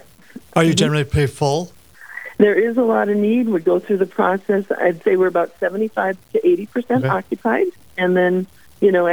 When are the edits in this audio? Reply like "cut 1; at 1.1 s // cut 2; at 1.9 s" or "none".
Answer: cut 1; at 1.7 s